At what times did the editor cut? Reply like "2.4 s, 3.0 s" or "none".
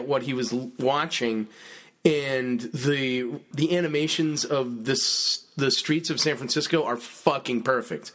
3.5 s